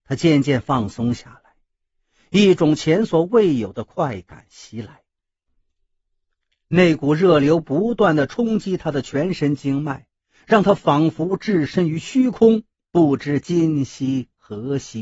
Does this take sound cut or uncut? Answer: uncut